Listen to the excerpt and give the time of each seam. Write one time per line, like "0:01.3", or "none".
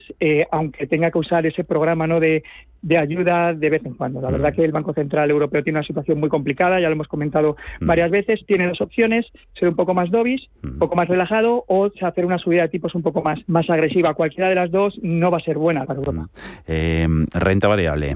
0:13.4
0:15.8